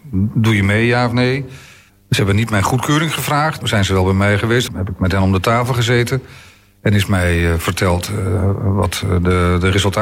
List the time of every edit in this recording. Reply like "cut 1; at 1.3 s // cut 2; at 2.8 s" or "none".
cut 1; at 1.9 s // cut 2; at 3.6 s // cut 3; at 4.7 s